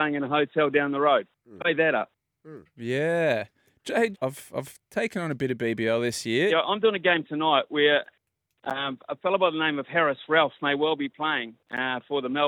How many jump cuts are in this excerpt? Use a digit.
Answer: 2